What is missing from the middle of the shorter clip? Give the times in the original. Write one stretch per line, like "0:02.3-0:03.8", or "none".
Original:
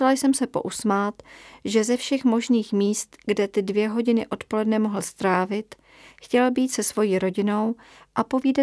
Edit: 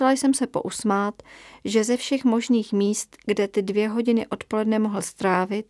none